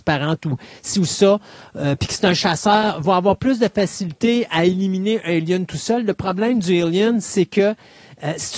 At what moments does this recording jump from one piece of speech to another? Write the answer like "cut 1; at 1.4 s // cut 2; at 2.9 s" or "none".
none